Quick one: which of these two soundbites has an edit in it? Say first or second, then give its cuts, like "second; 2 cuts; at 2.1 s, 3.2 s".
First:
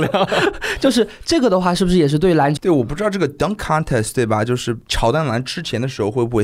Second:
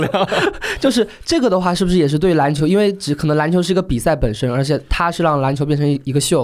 first; 1 cut; at 2.6 s